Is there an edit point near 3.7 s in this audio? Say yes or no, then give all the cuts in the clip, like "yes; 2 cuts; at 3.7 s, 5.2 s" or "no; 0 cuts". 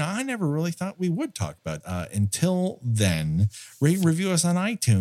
no; 1 cut; at 1.8 s